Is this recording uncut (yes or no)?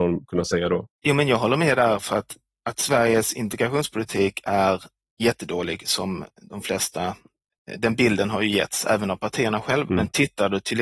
no